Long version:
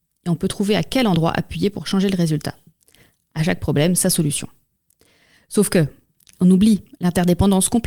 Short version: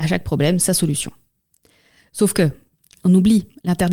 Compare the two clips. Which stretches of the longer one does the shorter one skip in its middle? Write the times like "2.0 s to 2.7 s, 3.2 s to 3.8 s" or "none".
none